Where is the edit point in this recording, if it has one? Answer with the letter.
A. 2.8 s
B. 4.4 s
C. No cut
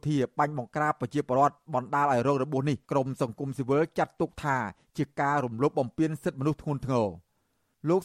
A